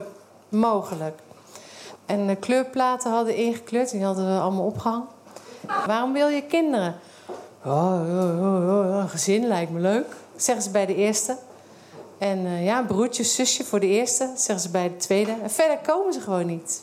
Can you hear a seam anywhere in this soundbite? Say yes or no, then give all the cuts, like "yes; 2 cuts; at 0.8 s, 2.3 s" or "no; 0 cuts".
yes; 2 cuts; at 2.0 s, 5.9 s